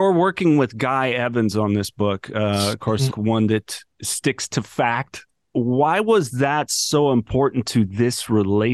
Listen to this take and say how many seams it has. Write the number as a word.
one